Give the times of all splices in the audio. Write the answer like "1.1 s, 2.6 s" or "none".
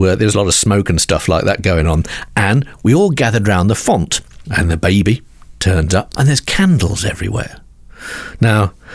6.1 s